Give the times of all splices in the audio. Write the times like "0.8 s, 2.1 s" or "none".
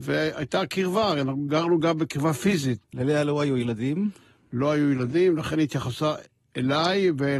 2.8 s